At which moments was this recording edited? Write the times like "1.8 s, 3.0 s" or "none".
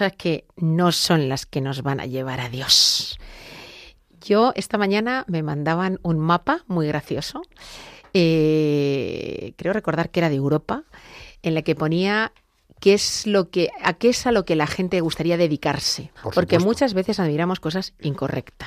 16.2 s